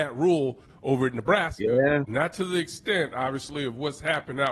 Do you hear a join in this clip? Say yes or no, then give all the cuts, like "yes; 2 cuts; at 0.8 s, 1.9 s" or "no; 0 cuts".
yes; 1 cut; at 2.1 s